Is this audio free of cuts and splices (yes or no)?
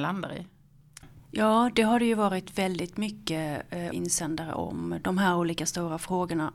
no